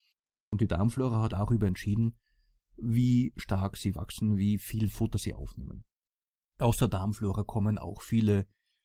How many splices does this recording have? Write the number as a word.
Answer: one